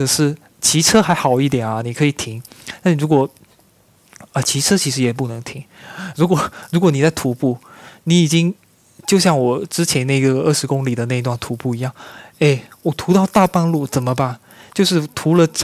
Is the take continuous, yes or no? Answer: yes